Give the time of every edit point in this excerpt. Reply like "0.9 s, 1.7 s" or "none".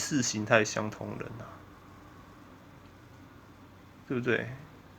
none